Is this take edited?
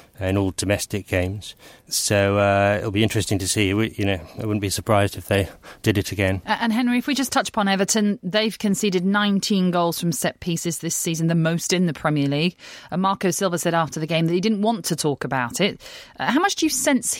no; 0 cuts

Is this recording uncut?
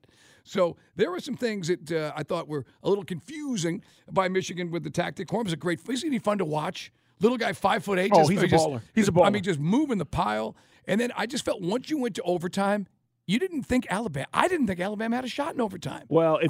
no; 1 cut; at 5.3 s

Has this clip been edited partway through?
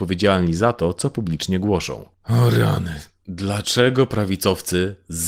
yes; 1 cut; at 2.1 s

